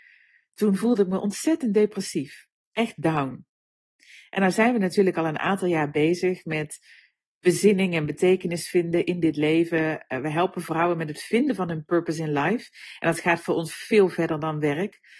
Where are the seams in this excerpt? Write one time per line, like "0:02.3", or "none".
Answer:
none